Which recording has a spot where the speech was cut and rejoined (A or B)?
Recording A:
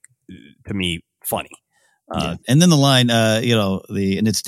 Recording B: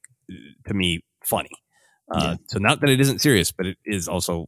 A